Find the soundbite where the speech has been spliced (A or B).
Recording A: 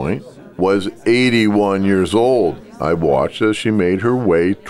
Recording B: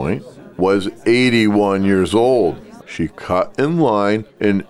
B